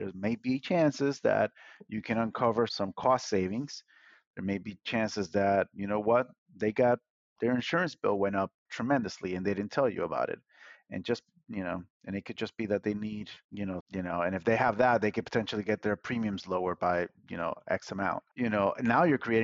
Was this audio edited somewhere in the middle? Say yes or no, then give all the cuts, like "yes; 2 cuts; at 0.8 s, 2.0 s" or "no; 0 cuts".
yes; 2 cuts; at 2.7 s, 13.8 s